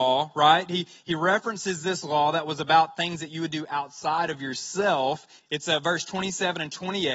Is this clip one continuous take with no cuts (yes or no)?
no